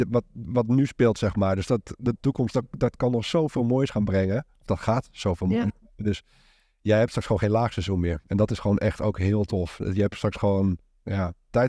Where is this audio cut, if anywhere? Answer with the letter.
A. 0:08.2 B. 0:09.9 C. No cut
C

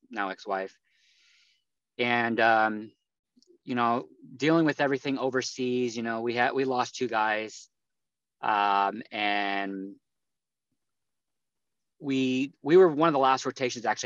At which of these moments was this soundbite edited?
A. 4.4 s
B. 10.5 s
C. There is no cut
C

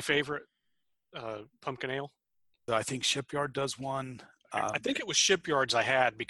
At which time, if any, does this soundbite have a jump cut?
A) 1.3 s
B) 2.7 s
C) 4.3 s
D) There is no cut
B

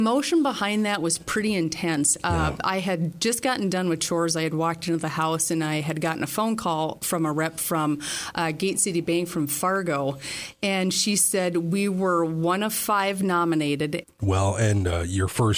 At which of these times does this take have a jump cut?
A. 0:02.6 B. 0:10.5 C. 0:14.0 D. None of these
C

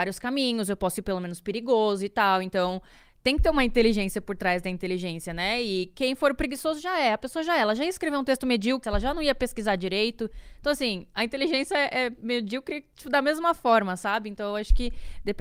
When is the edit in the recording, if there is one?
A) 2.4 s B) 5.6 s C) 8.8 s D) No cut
C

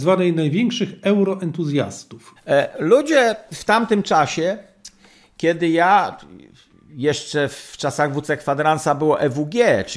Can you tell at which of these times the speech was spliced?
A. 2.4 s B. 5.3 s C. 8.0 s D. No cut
A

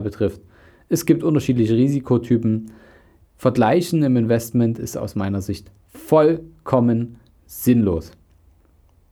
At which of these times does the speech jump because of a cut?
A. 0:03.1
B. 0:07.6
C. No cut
C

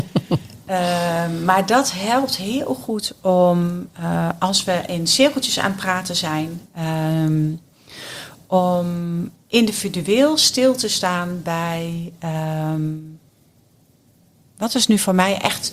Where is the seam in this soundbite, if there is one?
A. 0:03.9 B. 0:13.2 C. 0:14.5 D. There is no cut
D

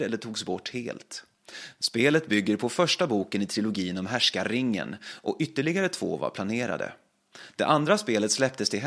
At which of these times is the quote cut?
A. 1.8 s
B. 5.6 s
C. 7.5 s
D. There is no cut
A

